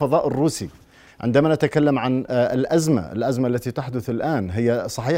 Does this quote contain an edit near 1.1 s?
yes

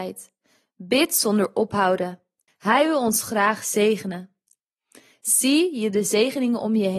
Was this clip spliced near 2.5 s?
yes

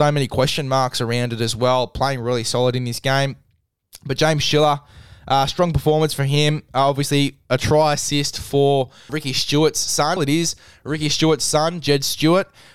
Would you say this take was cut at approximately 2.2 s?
no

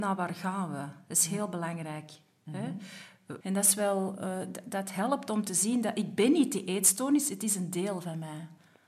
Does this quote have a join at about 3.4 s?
yes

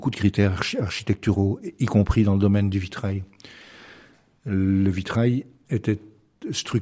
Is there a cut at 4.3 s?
no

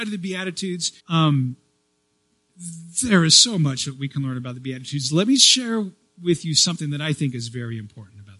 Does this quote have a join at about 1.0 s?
yes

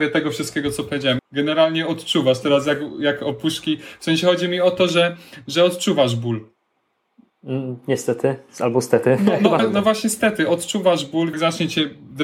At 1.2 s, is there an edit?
yes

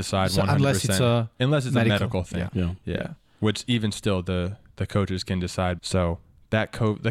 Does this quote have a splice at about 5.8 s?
yes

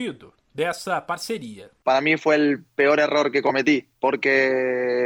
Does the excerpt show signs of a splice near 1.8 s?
no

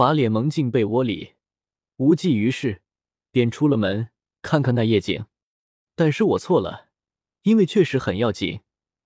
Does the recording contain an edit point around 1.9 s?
no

